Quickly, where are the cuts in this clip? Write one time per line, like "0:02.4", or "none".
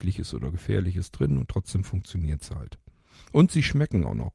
none